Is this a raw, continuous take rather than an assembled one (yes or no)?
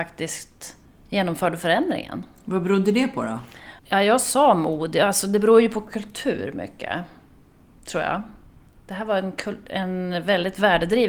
no